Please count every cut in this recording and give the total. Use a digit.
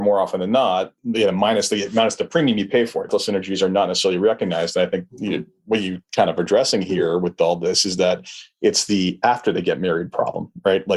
1